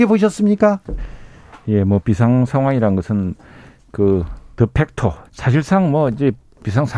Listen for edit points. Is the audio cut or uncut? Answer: cut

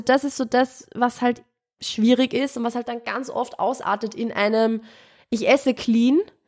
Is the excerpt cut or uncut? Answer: uncut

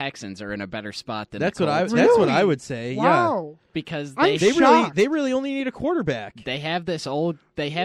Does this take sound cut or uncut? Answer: uncut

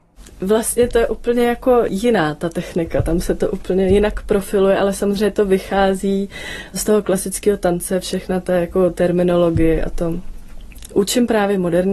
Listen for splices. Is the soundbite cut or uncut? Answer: cut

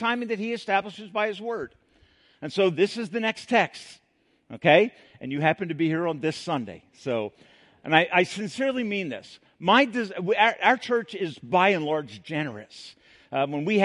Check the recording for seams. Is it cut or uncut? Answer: uncut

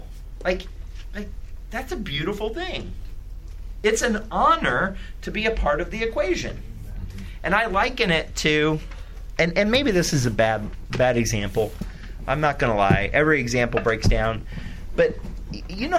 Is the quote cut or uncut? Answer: uncut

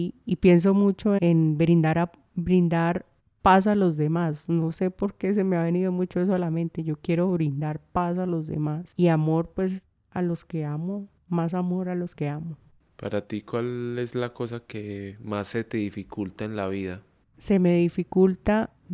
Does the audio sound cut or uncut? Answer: cut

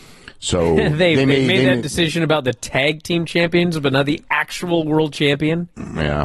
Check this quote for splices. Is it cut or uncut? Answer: uncut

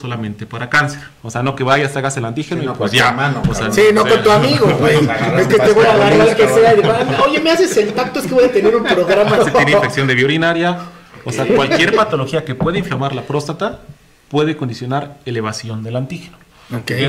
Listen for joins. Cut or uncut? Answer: cut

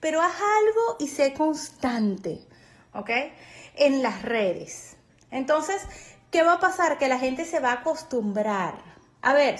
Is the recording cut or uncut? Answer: uncut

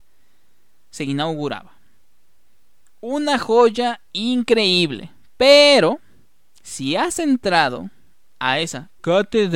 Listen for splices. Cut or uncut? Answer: uncut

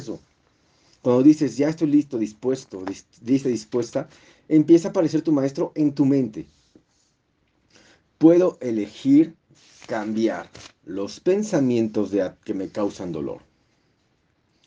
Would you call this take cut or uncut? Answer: uncut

